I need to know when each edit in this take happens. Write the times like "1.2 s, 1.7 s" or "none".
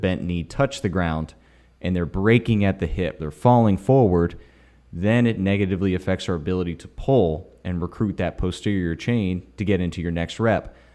3.2 s